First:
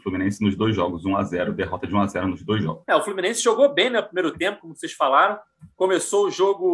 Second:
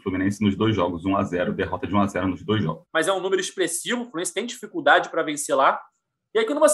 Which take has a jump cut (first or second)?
second